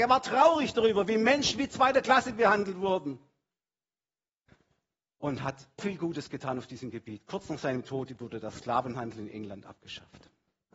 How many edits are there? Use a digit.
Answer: 1